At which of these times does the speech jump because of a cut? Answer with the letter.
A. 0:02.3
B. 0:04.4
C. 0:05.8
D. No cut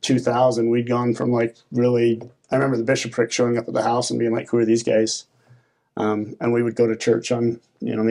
D